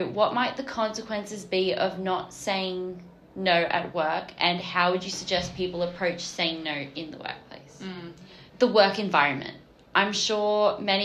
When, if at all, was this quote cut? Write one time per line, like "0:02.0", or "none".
0:08.5